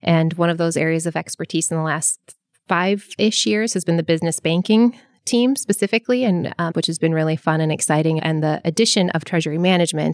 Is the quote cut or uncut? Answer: cut